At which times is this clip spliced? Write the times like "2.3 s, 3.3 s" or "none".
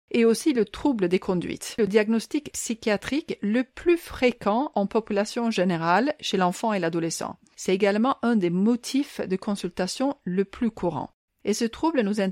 11.3 s